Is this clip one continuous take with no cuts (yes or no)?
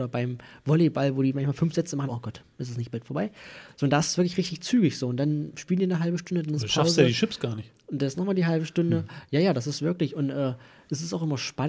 no